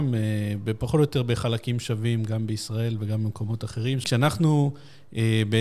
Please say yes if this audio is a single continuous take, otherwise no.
no